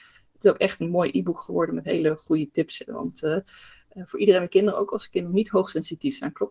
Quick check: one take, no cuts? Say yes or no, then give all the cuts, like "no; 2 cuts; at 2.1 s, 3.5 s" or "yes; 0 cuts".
no; 1 cut; at 2.9 s